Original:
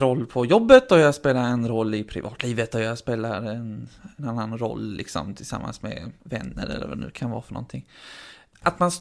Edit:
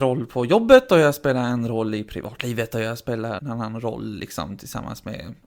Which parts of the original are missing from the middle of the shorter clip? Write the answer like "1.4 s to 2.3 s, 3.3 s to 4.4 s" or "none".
3.4 s to 4.1 s

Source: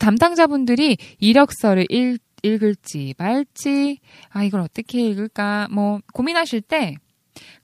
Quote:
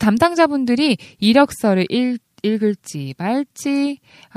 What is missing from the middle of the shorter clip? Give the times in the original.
none

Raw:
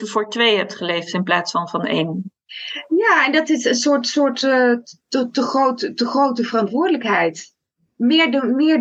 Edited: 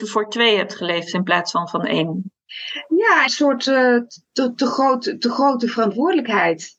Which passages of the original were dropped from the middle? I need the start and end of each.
3.3 s to 4.0 s

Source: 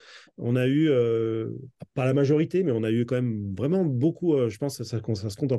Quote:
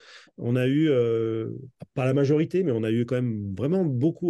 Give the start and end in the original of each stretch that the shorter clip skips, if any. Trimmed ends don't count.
none

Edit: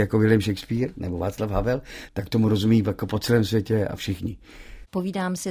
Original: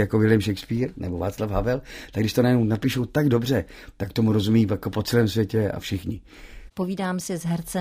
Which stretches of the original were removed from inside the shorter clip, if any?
2.1 s to 3.9 s

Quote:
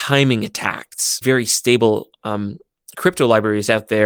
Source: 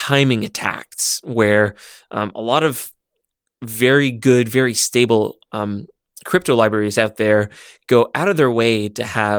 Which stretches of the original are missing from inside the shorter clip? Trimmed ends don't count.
1.2 s to 4.5 s

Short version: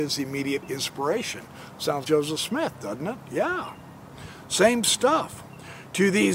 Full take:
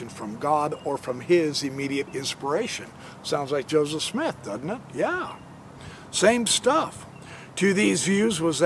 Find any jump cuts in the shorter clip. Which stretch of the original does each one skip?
3.5 s to 3.7 s

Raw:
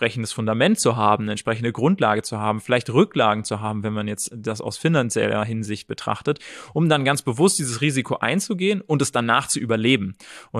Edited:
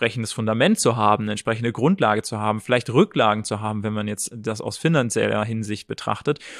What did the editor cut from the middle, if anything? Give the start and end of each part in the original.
none

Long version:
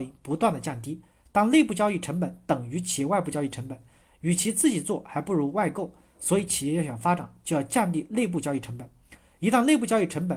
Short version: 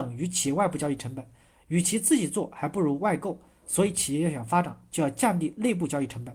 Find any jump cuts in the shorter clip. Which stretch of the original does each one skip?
none

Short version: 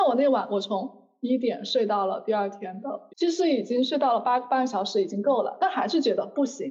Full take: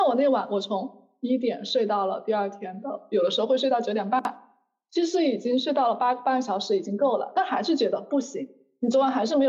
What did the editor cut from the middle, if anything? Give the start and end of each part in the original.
3.1 s to 4.8 s

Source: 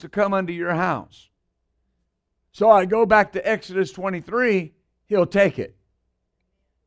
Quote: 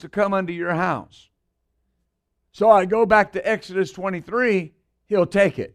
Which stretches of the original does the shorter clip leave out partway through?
none

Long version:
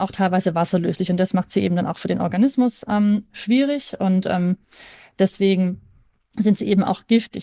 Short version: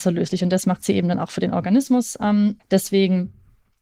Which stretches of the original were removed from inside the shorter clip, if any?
3.3 s to 5.1 s

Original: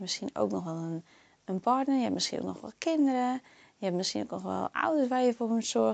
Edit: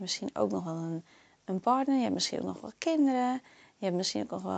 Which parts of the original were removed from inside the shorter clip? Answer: none

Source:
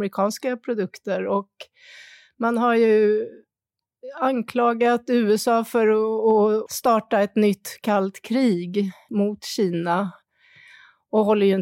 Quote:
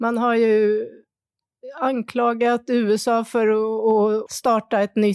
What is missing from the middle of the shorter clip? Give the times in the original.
none

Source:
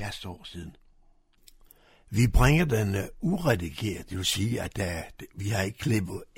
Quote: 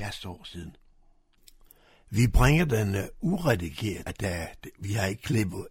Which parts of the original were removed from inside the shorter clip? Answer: 4.1 s to 4.6 s

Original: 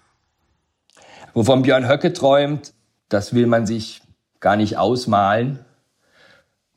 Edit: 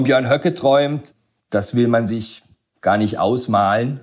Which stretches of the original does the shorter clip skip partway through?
none

